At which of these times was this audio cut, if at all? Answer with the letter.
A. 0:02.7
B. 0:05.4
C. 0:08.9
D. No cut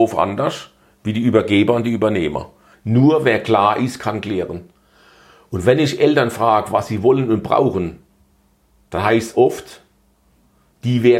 A